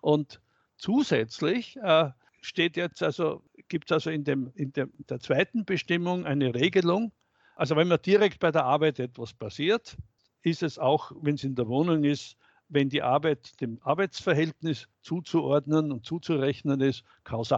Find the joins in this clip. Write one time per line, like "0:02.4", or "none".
none